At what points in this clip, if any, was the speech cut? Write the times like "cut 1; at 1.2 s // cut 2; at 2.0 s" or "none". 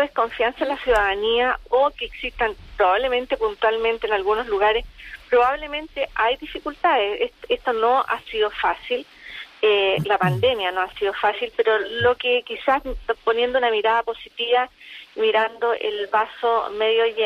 none